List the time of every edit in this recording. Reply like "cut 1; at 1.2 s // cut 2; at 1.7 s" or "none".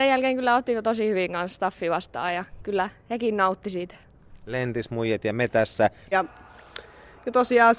cut 1; at 6.1 s